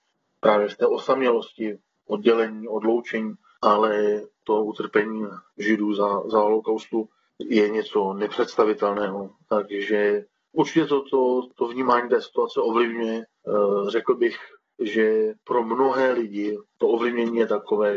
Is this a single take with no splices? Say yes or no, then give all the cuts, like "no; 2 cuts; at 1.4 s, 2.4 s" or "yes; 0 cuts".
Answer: yes; 0 cuts